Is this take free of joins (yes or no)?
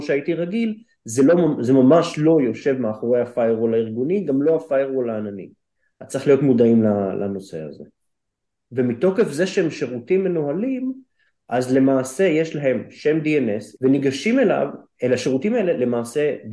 no